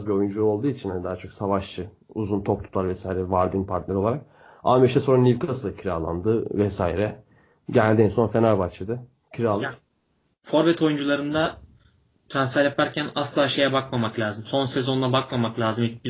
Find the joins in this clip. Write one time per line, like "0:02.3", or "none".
0:14.4